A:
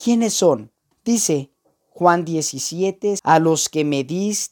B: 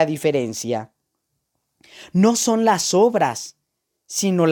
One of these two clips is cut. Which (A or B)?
A